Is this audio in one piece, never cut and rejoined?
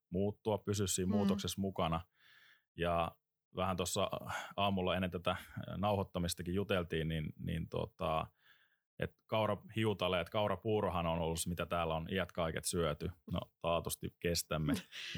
no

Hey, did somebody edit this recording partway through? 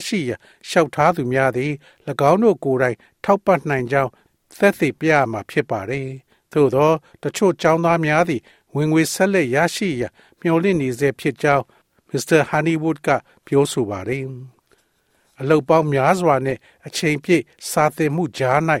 no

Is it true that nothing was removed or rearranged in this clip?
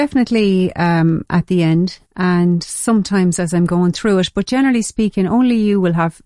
no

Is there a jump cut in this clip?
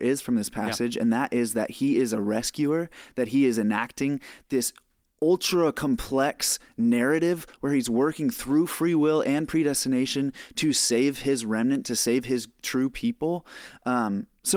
no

